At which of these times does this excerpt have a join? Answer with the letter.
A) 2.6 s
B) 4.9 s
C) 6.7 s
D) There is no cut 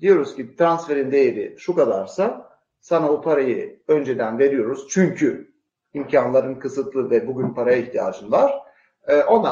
D